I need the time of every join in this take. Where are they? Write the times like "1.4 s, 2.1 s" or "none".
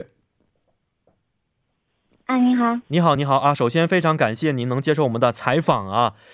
3.2 s